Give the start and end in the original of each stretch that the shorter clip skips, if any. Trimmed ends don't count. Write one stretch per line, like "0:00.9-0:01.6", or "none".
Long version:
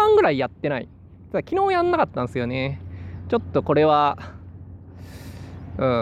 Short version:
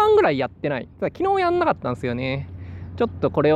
0:00.9-0:01.3

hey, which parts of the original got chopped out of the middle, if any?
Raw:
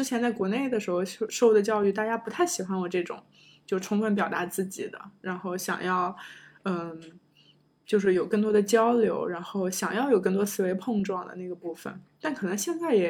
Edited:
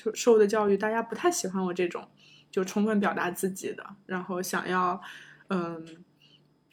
none

